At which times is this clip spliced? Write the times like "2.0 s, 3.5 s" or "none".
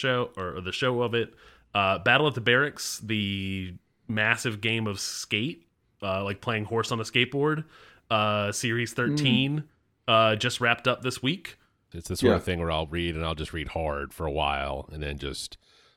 11.9 s